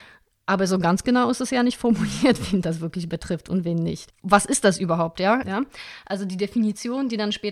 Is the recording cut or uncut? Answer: cut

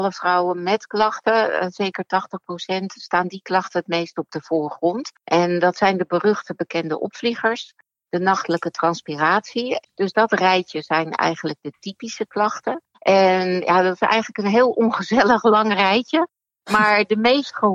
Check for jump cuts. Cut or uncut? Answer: cut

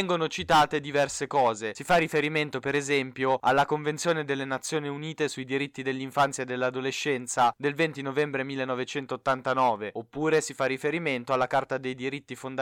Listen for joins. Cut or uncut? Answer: uncut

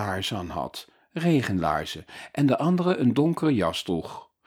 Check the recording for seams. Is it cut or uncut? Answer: uncut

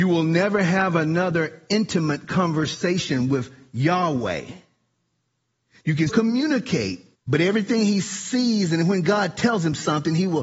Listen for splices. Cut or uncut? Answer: cut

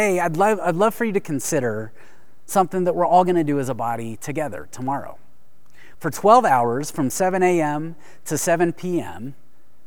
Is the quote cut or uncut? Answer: cut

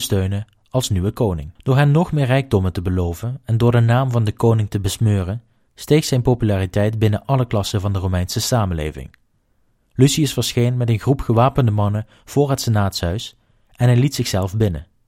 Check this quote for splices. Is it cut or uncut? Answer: cut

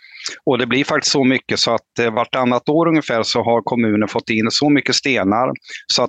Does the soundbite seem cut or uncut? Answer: uncut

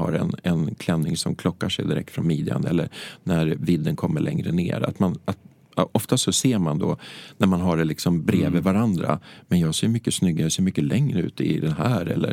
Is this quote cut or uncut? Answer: uncut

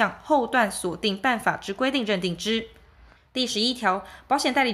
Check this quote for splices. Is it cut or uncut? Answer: cut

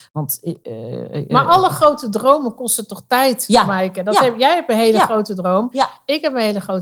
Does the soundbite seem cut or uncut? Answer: uncut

